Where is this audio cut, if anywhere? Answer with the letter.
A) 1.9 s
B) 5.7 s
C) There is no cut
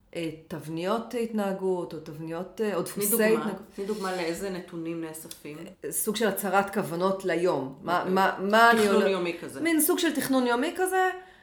B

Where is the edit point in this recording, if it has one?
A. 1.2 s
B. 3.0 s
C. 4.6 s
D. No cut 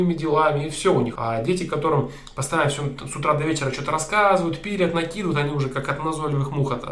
A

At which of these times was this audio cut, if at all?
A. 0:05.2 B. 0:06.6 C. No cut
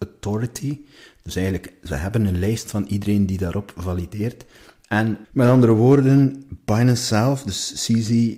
A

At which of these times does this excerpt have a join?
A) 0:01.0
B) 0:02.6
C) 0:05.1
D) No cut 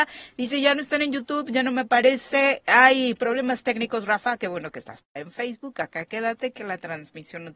C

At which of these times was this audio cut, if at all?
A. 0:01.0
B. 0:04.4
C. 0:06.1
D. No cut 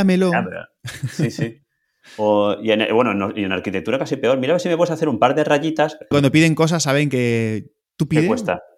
C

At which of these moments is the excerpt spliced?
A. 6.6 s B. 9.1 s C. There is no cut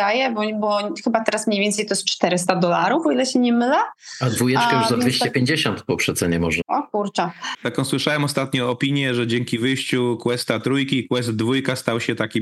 A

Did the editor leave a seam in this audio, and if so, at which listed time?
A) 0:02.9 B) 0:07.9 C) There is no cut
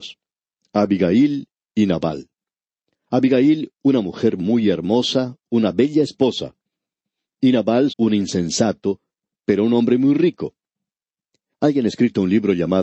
B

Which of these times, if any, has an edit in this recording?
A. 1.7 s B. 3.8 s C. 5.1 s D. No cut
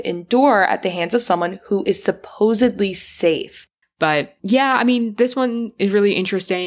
B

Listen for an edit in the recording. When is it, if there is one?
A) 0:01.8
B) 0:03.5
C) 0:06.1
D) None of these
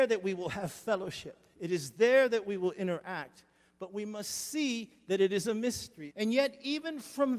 C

